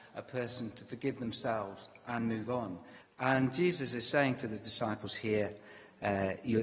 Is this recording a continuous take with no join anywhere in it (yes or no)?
no